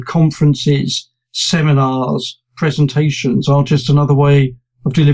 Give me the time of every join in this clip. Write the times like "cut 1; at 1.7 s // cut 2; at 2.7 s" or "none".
none

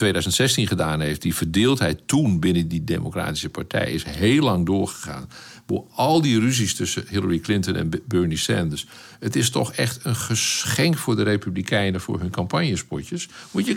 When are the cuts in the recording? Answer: none

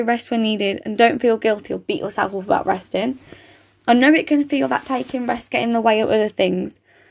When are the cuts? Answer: none

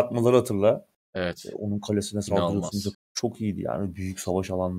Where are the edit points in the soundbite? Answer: cut 1; at 2.9 s

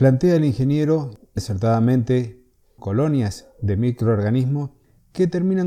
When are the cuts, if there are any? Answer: cut 1; at 1.4 s // cut 2; at 2.8 s

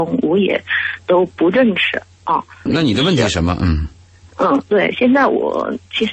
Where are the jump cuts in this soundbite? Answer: cut 1; at 2.7 s

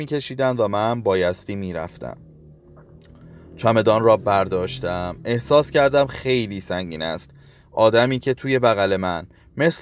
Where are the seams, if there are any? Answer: none

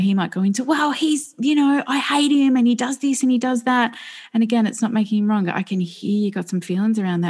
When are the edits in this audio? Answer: none

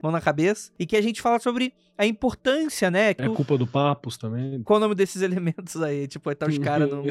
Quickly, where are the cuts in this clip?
cut 1; at 3.2 s // cut 2; at 4.6 s

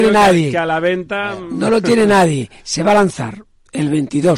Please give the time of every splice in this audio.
none

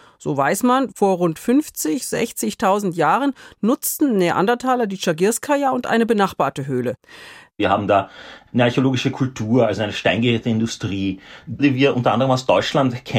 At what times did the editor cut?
cut 1; at 7.5 s

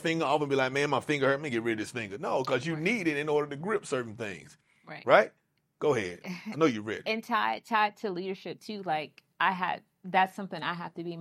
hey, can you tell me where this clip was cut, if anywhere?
cut 1; at 6.2 s

